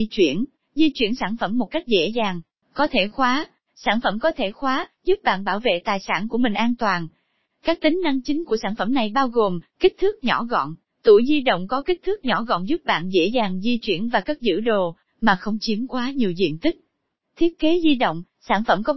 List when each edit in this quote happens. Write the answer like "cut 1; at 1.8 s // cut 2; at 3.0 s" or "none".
cut 1; at 2.6 s // cut 2; at 7.5 s